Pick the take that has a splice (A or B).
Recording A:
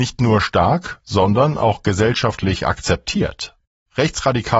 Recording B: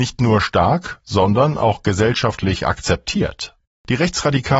B